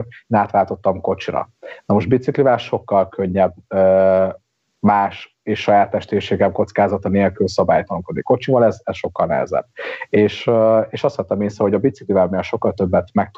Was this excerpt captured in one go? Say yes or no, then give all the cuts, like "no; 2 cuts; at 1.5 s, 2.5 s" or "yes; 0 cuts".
yes; 0 cuts